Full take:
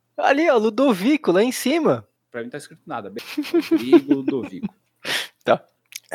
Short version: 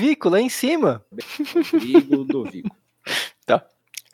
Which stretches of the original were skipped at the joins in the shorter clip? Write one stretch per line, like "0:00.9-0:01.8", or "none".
0:02.1-0:03.1